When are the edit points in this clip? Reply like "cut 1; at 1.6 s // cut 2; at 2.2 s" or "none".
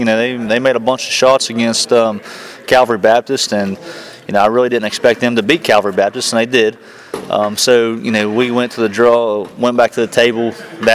none